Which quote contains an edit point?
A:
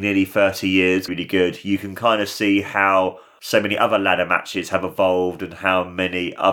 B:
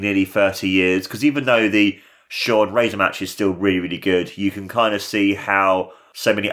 A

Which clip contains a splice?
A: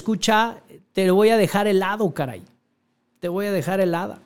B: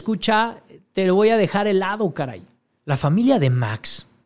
B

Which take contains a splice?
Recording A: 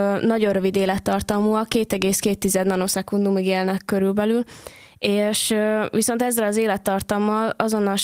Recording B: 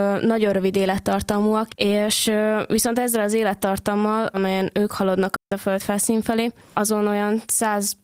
B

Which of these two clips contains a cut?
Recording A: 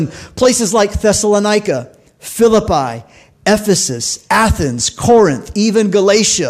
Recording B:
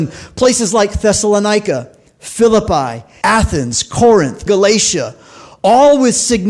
B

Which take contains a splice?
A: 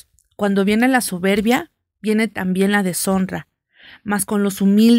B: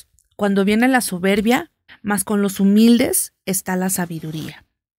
B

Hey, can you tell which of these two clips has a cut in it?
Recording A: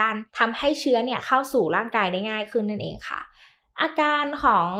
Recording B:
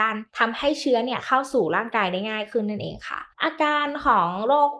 B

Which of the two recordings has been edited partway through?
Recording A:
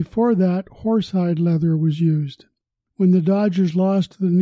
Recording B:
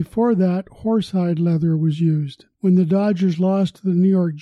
B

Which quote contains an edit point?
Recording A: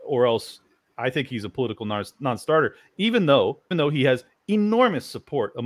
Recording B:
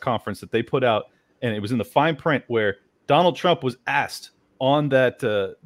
A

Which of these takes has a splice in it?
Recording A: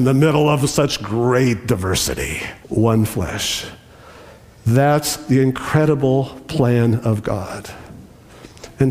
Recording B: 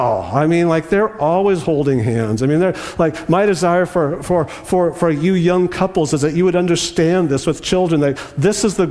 A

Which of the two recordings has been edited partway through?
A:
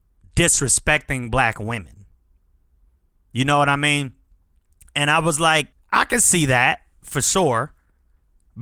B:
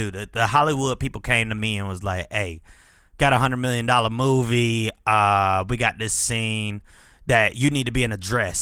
A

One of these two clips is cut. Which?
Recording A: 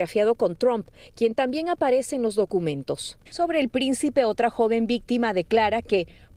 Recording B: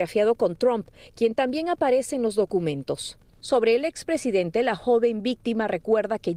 A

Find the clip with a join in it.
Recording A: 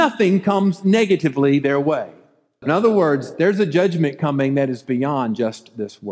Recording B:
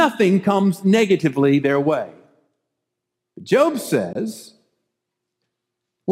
A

